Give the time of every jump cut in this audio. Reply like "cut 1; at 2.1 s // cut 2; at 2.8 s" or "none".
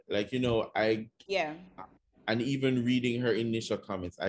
cut 1; at 1.3 s